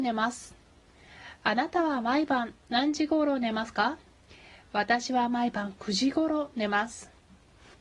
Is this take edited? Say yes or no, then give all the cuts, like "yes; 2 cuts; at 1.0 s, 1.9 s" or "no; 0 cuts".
no; 0 cuts